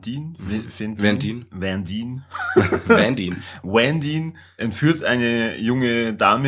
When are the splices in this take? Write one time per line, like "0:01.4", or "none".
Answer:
none